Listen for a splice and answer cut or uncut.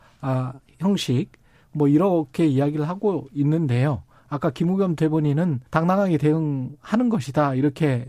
cut